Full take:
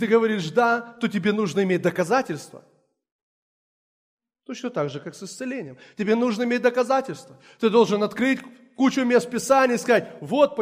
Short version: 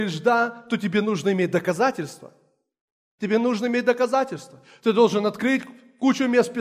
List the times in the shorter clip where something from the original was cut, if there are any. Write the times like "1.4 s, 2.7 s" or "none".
3.2 s